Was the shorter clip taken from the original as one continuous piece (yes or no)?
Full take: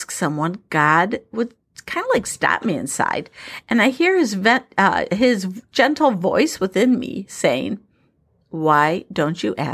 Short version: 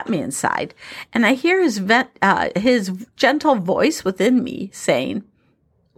yes